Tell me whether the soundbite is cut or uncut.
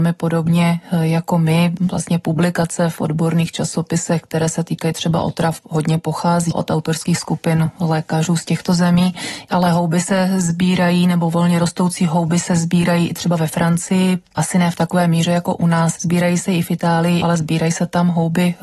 cut